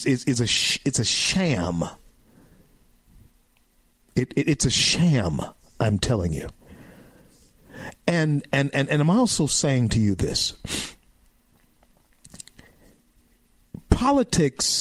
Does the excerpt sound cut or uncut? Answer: uncut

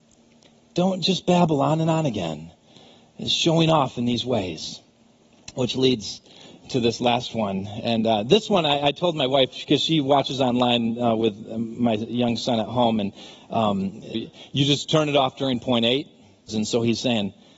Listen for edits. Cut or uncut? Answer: cut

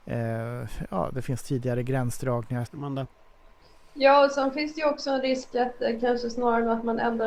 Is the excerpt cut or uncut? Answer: cut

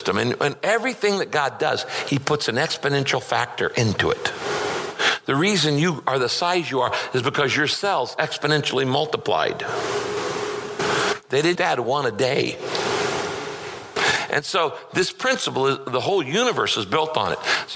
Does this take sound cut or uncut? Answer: cut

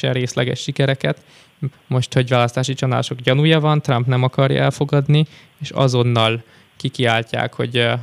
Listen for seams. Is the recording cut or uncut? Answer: cut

